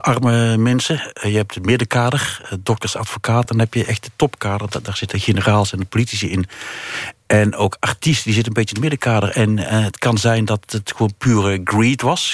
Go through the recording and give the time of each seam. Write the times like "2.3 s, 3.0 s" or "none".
none